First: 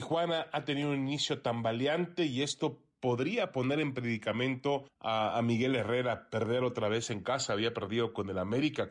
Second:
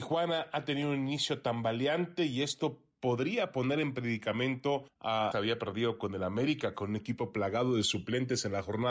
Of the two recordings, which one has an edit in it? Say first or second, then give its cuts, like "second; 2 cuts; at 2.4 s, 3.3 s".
second; 1 cut; at 5.3 s